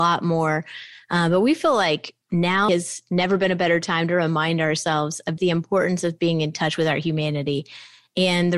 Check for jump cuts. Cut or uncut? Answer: cut